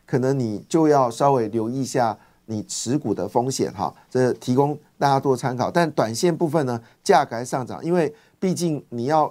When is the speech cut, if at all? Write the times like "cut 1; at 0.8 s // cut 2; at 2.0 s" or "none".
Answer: none